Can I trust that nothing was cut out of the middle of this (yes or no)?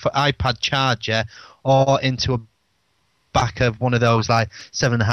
yes